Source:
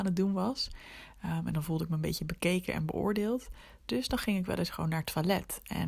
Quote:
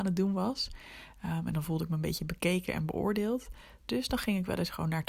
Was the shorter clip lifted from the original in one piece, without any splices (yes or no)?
yes